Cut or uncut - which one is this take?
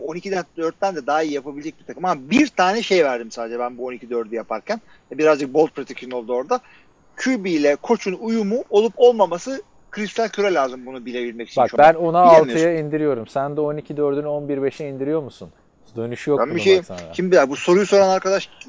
uncut